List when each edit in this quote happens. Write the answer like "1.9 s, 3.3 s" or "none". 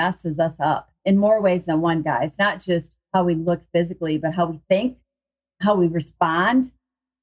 none